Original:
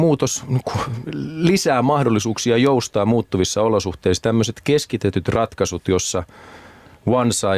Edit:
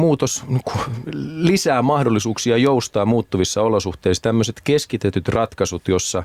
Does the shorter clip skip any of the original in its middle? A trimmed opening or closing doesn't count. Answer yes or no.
no